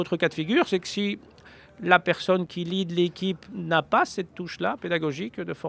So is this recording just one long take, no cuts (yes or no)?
yes